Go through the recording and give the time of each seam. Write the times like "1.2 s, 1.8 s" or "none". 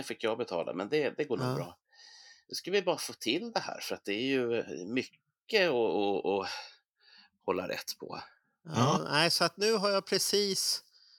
none